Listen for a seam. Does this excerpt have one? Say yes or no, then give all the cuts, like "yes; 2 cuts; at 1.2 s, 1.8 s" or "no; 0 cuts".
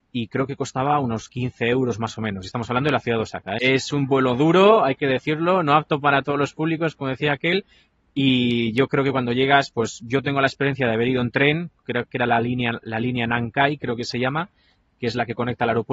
yes; 1 cut; at 3.6 s